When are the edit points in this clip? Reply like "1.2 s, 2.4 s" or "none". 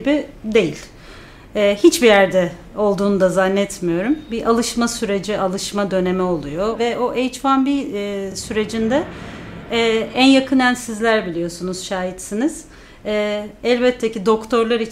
none